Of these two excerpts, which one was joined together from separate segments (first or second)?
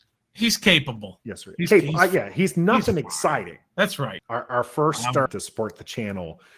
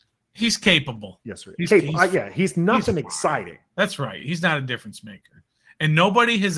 first